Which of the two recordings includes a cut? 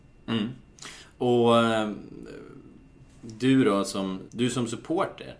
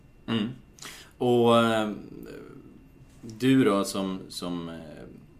first; 1 cut; at 4.3 s

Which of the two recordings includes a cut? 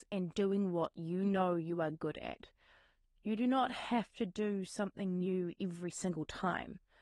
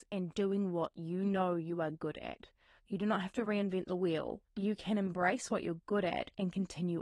second; 2 cuts; at 2.8 s, 4.4 s

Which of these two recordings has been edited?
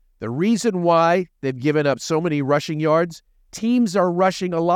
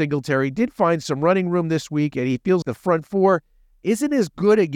second; 1 cut; at 2.6 s

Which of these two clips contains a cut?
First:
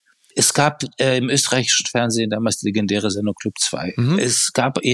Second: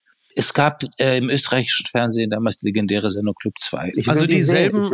second; 1 cut; at 3.9 s

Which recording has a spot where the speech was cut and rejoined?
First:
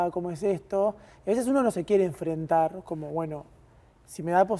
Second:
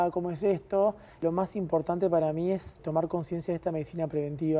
second; 2 cuts; at 1.2 s, 2.8 s

